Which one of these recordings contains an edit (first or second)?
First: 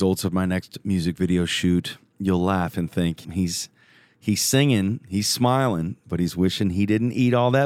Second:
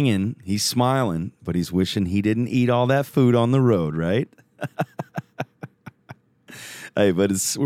first